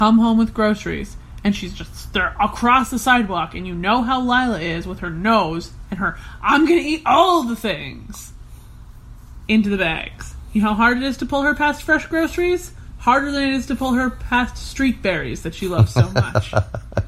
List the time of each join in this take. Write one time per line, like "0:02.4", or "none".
none